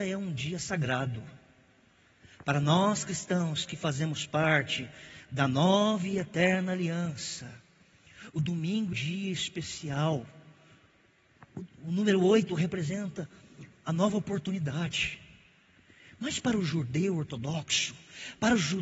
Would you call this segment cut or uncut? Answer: cut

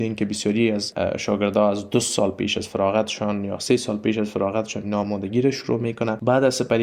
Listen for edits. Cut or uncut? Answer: uncut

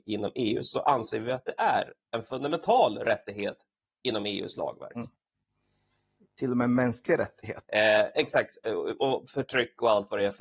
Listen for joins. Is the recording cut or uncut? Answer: cut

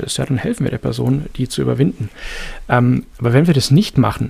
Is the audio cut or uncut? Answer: uncut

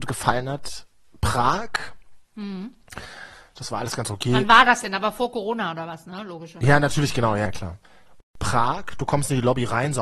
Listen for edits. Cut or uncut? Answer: uncut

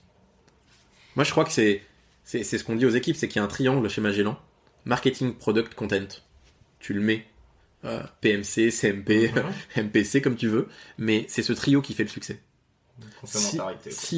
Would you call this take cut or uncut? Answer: uncut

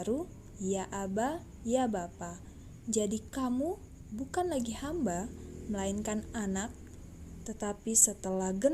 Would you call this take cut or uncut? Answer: cut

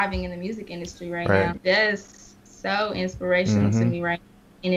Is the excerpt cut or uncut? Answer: cut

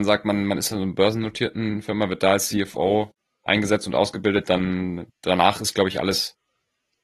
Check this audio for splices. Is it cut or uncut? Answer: uncut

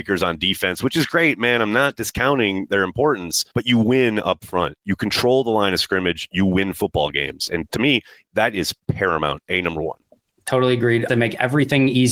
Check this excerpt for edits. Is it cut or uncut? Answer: cut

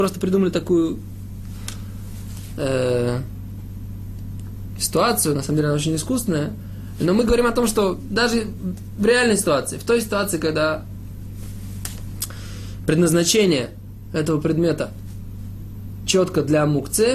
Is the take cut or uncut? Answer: uncut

